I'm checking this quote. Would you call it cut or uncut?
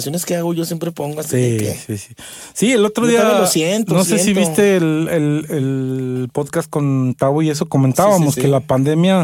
uncut